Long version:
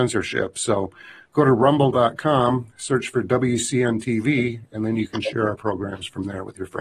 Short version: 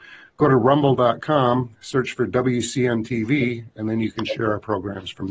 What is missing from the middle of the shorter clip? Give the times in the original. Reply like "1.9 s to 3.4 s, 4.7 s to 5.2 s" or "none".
none